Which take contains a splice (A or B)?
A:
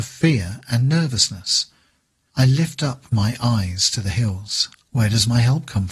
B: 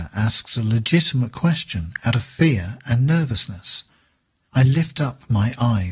A